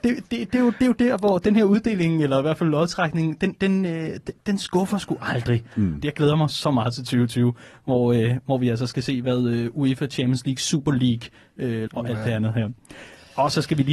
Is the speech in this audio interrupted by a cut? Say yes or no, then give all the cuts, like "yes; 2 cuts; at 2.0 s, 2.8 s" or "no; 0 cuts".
yes; 2 cuts; at 6.0 s, 11.9 s